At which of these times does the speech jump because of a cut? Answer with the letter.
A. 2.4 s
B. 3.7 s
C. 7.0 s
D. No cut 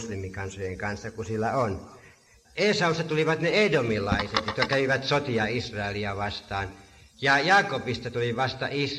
A